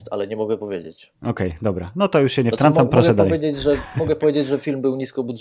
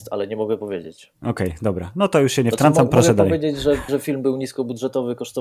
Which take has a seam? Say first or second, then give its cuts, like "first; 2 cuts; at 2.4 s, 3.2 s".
second; 1 cut; at 3.9 s